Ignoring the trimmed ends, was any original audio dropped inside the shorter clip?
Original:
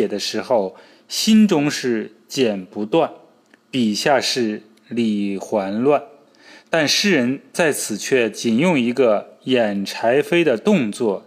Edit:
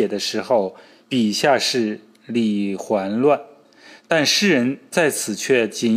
yes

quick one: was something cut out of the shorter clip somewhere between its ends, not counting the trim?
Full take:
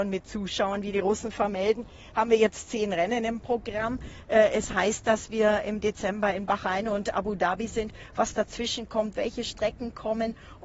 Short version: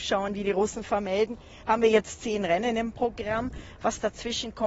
yes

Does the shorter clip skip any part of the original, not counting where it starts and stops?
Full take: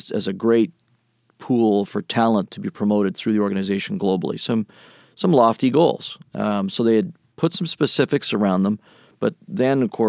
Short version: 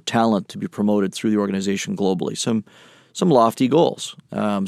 no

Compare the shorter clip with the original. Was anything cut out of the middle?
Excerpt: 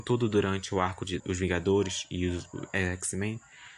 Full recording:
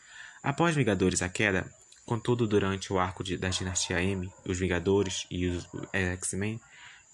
yes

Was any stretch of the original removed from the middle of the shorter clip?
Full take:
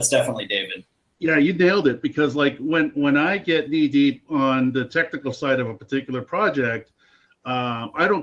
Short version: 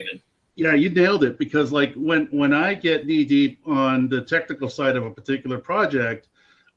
no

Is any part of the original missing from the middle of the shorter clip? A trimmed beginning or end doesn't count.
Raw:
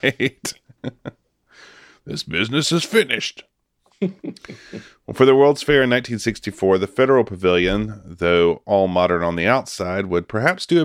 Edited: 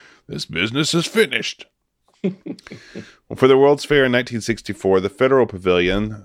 no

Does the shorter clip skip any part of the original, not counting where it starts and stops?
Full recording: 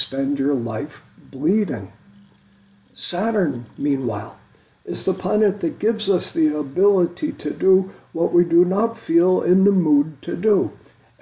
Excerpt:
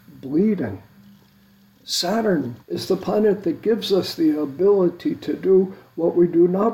yes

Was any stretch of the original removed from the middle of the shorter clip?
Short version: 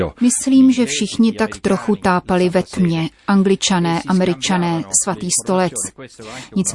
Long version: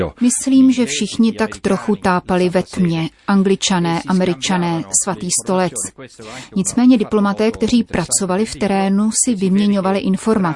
no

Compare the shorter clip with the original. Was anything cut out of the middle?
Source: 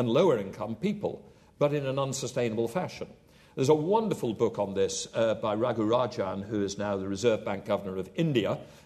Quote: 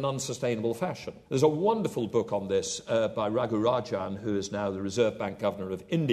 yes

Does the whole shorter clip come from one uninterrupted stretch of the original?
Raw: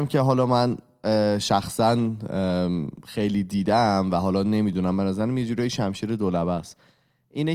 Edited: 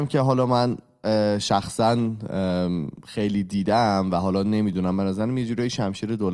yes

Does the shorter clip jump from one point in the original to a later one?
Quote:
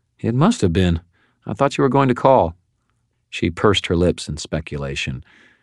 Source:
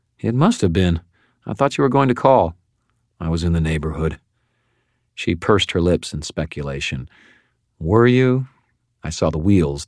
yes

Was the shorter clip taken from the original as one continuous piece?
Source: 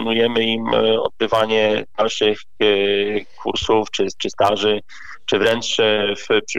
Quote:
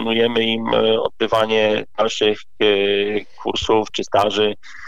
no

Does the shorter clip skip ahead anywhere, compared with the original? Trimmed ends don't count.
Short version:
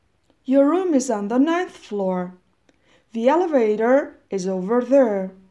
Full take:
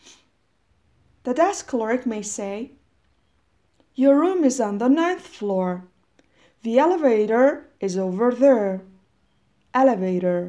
no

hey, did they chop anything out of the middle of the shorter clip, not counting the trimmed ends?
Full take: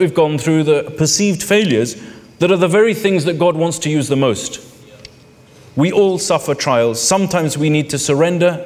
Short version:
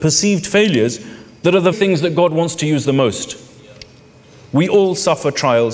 yes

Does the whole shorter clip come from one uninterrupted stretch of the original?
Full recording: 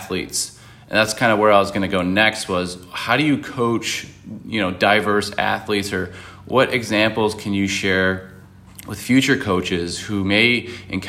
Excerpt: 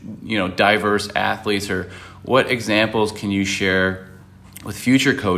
yes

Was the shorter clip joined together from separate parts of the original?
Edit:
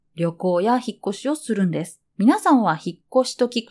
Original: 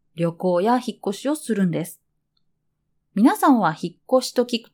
yes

